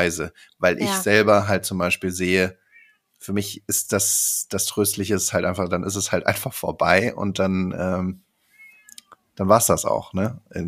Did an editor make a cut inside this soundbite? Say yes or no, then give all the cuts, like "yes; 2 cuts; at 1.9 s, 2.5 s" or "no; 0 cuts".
no; 0 cuts